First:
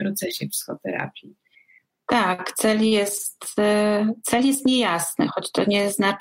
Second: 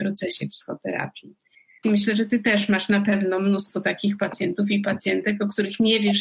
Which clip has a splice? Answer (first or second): second